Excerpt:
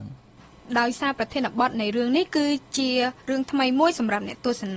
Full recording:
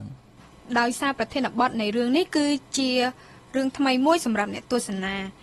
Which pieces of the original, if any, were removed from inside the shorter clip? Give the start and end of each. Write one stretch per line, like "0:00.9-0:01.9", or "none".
0:03.2-0:03.5